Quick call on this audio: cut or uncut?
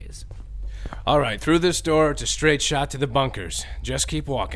uncut